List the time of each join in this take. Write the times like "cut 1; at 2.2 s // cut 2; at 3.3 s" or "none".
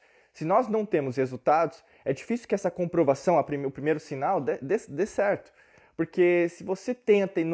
none